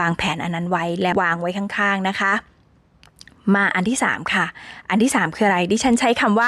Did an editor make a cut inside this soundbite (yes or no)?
yes